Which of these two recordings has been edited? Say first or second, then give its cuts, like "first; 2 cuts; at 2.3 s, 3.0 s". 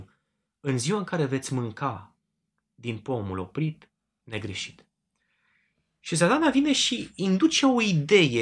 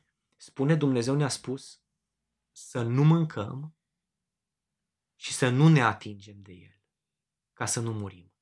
first; 1 cut; at 4.2 s